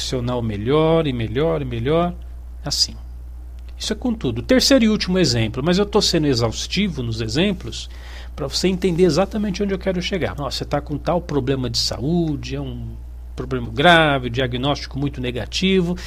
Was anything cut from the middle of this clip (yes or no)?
yes